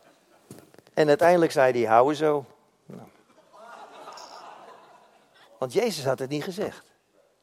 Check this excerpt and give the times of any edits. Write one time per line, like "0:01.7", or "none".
0:05.4

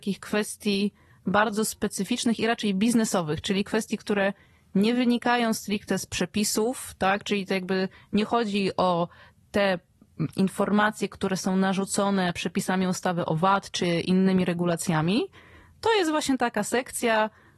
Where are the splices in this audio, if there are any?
none

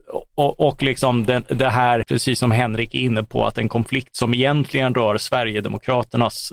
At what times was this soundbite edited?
0:02.0

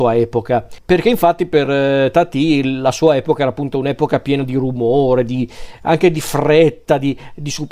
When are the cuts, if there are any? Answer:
none

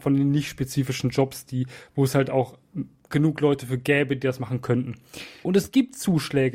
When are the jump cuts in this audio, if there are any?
0:05.4

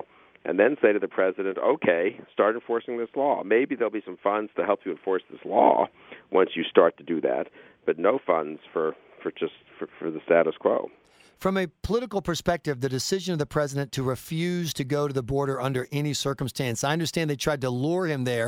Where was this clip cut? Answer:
none

